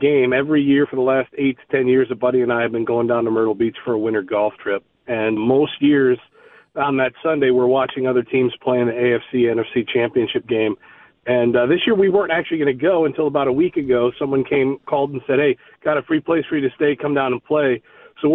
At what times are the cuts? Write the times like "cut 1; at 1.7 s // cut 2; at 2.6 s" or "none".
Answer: cut 1; at 5.4 s